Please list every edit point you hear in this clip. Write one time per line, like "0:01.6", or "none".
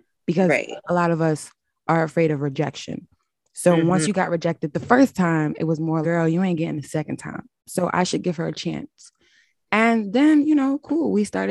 0:06.0
0:07.6